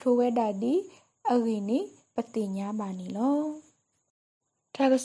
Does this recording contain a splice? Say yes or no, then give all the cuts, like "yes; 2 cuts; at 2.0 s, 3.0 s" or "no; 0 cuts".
no; 0 cuts